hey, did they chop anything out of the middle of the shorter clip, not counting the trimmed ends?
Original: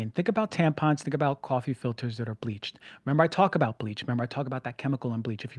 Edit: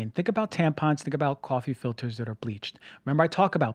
no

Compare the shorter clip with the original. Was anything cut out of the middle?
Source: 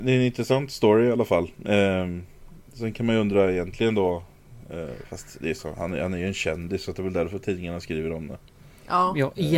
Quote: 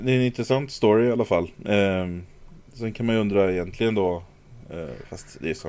no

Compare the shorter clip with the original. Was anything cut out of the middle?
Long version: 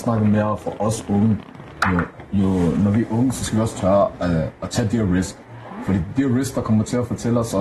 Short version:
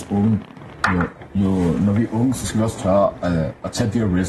no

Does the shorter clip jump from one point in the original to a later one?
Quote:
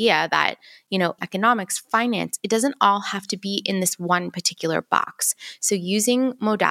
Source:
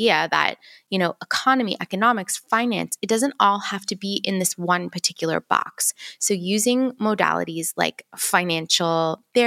yes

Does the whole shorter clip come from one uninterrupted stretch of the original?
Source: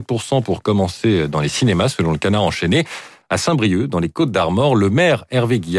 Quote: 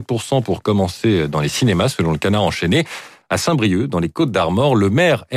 yes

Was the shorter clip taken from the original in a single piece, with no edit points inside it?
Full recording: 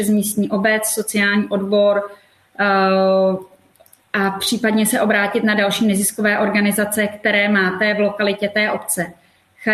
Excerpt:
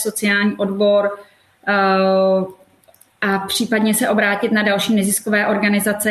yes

